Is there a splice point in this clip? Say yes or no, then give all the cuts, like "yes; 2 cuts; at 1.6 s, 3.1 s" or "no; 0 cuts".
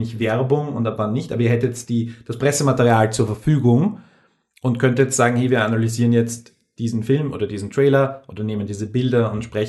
no; 0 cuts